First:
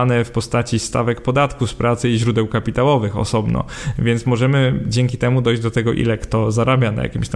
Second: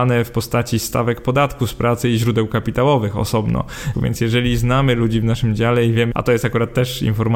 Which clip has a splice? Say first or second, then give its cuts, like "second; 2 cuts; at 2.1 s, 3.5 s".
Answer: second; 2 cuts; at 3.9 s, 6.1 s